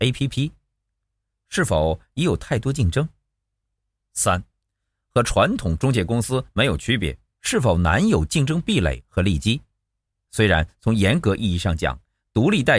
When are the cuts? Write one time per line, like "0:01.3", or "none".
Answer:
0:07.3
0:10.2